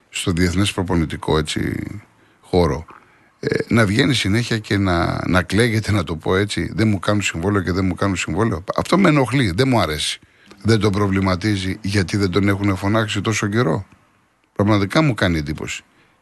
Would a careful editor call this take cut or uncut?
cut